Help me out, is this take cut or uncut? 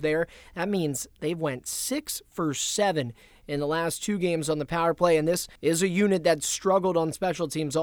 cut